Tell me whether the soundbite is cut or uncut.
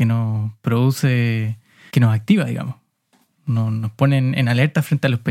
cut